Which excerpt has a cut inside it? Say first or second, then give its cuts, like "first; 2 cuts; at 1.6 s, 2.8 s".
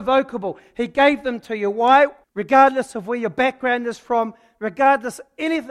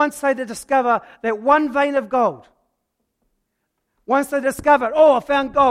first; 1 cut; at 2.2 s